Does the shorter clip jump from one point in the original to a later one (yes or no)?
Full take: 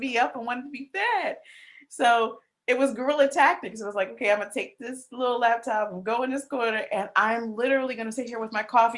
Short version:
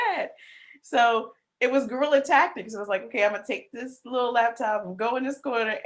no